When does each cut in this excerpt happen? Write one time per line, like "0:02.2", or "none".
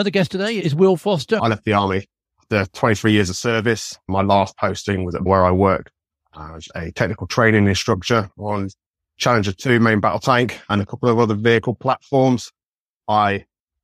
0:01.4